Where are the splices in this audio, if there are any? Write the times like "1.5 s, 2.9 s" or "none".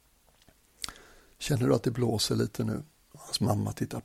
3.1 s

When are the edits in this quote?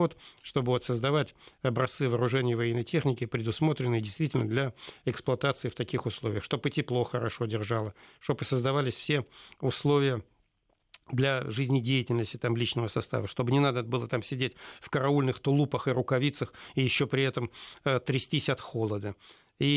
none

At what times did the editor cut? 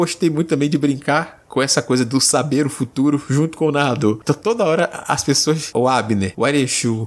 4.2 s

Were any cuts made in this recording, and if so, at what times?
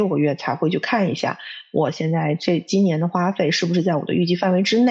none

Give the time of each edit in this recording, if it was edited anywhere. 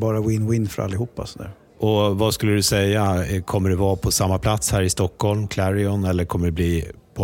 none

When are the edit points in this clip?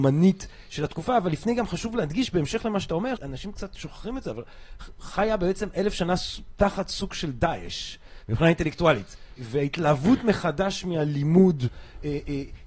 3.2 s, 9.4 s

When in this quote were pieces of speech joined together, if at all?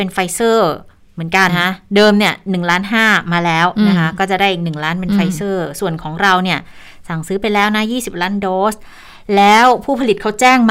1.5 s

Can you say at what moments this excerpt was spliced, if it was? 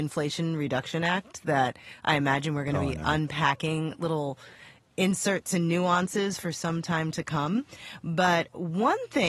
none

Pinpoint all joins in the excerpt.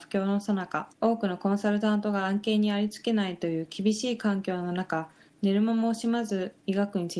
0.9 s

